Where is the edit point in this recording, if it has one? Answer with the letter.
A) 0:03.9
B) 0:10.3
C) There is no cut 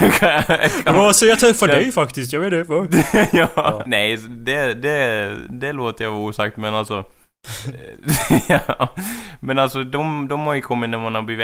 A